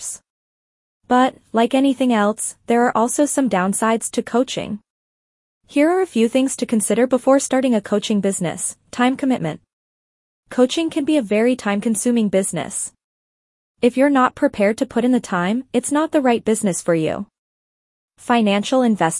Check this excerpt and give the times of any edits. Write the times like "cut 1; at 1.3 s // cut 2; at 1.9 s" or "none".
none